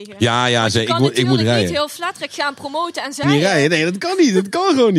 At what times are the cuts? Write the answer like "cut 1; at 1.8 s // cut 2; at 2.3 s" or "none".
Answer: cut 1; at 3.2 s